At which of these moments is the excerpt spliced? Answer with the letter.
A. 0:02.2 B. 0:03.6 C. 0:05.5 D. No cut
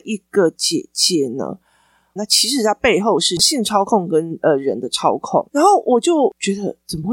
A